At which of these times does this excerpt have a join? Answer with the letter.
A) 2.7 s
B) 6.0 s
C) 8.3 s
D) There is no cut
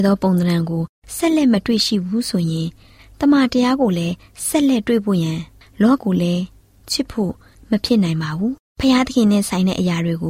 B